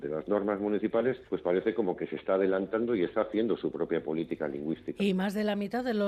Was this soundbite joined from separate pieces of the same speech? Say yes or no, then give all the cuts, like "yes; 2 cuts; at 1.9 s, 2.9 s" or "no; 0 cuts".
yes; 1 cut; at 1.3 s